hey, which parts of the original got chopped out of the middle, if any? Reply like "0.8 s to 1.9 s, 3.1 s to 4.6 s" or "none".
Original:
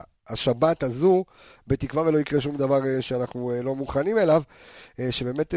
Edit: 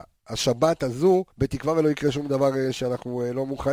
1.3 s to 1.6 s